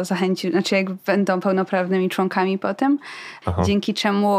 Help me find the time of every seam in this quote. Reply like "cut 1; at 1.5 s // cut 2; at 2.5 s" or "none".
cut 1; at 3.4 s